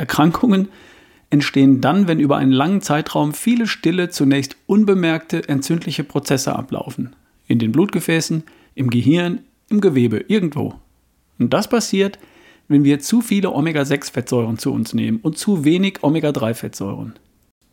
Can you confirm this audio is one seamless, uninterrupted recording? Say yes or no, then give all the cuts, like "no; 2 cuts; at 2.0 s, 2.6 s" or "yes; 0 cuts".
yes; 0 cuts